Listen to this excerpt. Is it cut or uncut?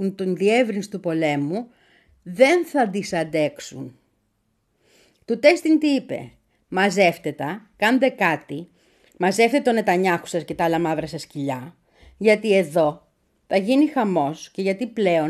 uncut